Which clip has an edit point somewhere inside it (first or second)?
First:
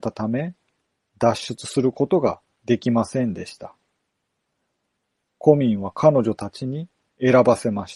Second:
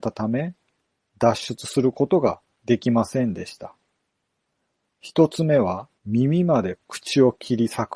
second